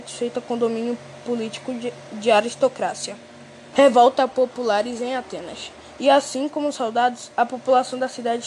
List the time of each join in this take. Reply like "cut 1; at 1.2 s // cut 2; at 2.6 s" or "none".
cut 1; at 3.7 s // cut 2; at 6.0 s